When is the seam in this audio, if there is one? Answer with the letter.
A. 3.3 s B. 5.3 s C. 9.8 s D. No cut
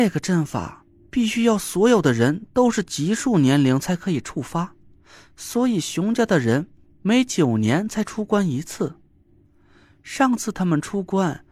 D